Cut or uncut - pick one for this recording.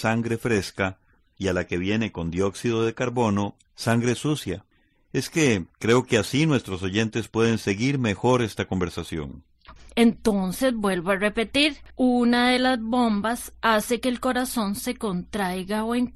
cut